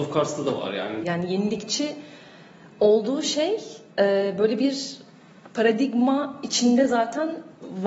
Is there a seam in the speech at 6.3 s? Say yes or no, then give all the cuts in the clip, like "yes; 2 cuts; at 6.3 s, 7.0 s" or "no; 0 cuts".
no; 2 cuts; at 1.0 s, 3.9 s